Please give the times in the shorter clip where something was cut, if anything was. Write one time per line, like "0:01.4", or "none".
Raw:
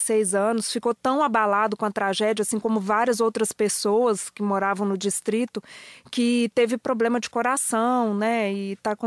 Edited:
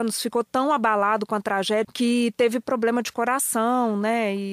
0:01.8